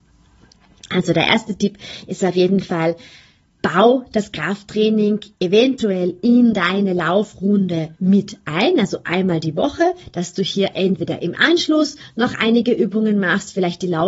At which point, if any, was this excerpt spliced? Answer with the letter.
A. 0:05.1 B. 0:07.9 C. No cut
B